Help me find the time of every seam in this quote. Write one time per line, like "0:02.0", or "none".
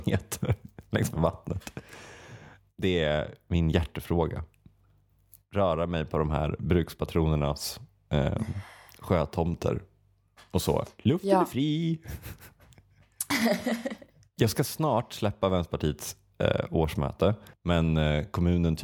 0:17.5